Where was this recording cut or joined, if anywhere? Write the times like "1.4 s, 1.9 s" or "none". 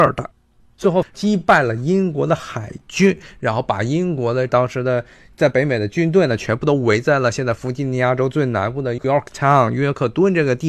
1.0 s

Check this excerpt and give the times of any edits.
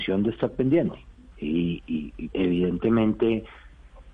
1.3 s, 2.3 s

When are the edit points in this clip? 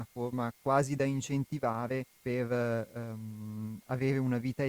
2.1 s

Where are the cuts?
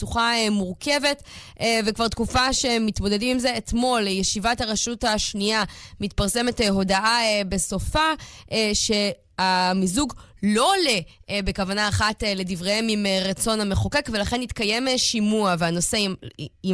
none

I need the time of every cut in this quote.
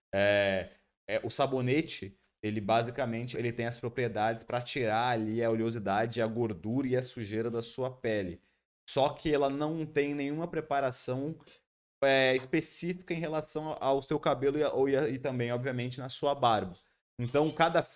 3.3 s

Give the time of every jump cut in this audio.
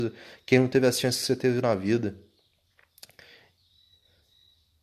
none

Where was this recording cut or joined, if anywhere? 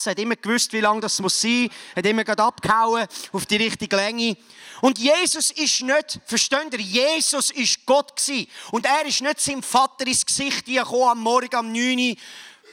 none

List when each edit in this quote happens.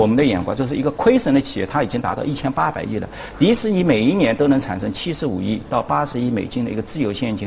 none

